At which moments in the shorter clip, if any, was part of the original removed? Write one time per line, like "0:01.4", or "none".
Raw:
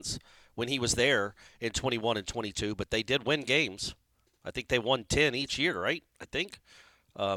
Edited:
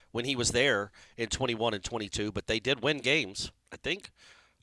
0:03.6